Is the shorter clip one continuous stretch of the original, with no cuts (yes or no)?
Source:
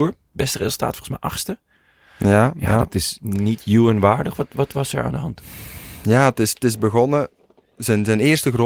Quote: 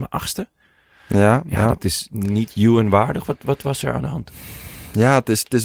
yes